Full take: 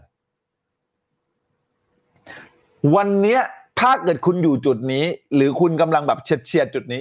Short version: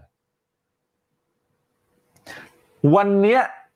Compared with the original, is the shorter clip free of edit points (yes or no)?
yes